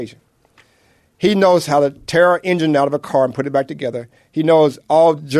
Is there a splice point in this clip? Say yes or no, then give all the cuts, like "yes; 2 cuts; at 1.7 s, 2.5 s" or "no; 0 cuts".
no; 0 cuts